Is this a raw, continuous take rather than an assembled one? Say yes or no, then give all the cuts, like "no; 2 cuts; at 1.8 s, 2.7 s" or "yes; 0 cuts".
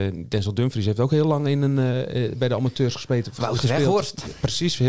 yes; 0 cuts